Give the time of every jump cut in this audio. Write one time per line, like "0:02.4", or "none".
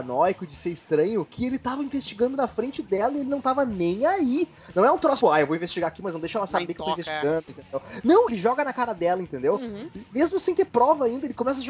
0:05.2
0:08.3